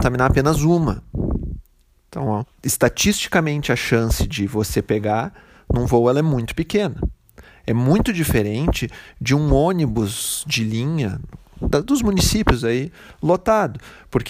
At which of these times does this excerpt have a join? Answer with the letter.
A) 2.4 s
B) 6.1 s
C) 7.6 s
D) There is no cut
A